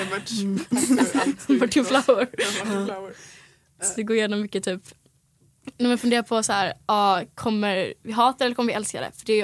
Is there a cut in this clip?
no; 0 cuts

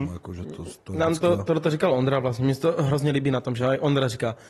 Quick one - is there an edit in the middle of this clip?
no; 0 cuts

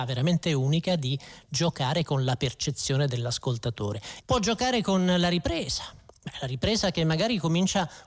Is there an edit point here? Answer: yes; 1 cut; at 4.2 s

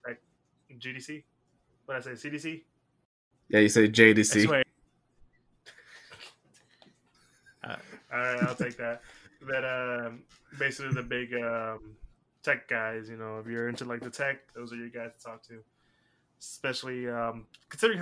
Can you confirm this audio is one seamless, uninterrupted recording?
no; 1 cut; at 14.5 s

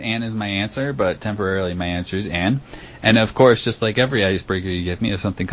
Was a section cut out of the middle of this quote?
no; 0 cuts

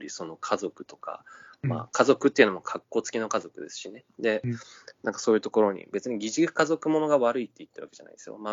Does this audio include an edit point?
no; 0 cuts

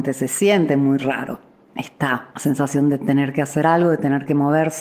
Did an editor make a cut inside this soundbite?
no; 0 cuts

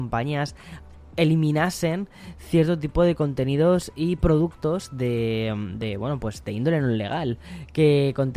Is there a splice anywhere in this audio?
no; 0 cuts

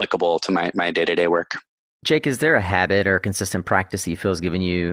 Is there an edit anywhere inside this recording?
no; 0 cuts

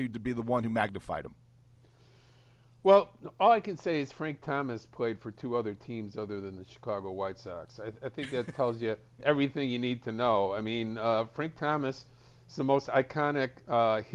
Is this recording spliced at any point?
no; 0 cuts

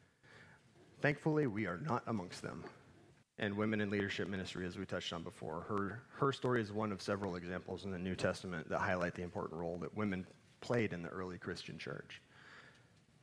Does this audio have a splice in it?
yes; 1 cut; at 3.2 s

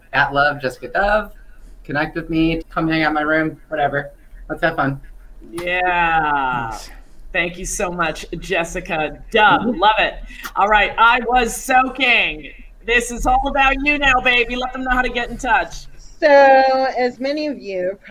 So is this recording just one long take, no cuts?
no; 1 cut; at 2.6 s

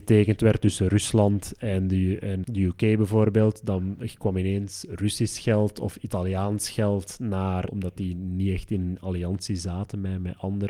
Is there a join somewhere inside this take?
yes; 2 cuts; at 2.4 s, 7.7 s

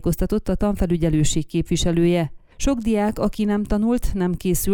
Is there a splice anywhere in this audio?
no; 0 cuts

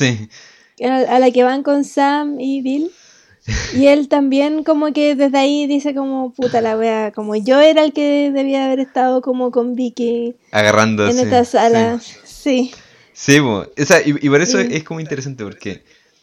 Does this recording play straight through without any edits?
yes; 0 cuts

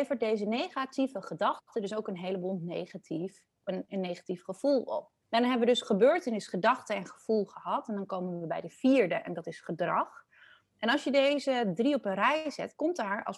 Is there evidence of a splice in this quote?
yes; 2 cuts; at 3.6 s, 5.2 s

